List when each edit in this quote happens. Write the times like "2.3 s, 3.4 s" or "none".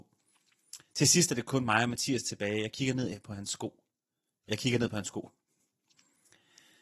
none